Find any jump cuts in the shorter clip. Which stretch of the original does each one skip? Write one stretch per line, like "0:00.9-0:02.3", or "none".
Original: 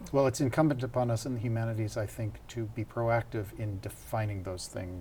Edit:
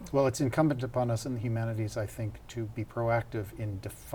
none